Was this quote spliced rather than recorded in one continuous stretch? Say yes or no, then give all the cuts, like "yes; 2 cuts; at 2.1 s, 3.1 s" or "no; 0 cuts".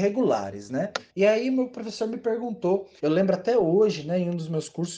yes; 2 cuts; at 1.1 s, 3.0 s